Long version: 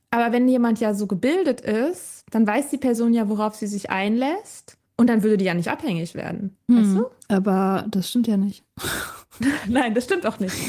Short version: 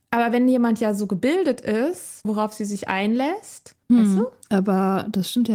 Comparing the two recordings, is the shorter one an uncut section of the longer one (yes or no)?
no